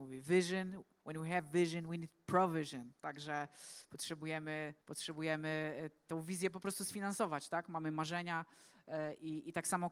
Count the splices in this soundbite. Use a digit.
1